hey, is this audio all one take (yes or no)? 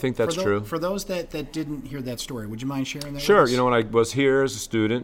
yes